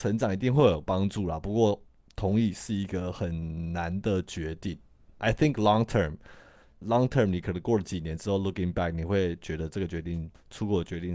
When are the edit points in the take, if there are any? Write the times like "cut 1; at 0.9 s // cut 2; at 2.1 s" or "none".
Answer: none